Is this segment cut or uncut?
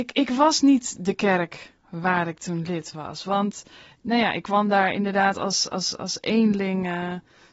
uncut